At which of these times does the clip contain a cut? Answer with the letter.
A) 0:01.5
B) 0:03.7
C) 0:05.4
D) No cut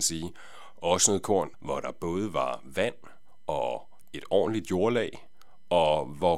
A